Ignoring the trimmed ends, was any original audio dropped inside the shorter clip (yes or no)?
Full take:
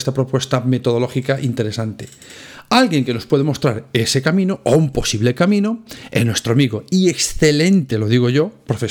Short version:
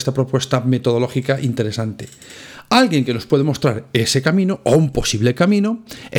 no